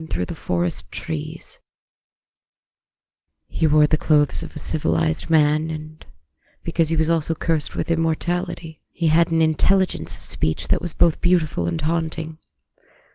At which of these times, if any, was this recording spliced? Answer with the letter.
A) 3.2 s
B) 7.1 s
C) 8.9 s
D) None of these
C